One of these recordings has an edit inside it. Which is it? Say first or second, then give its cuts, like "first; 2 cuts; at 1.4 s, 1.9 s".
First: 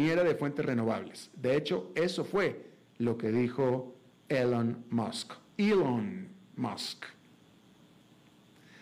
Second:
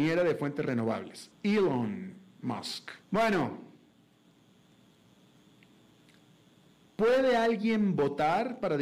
second; 2 cuts; at 1.3 s, 3.0 s